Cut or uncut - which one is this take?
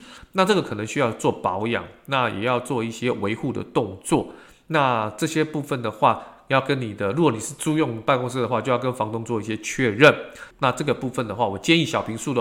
cut